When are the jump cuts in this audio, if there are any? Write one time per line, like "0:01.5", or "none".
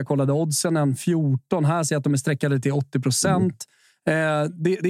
none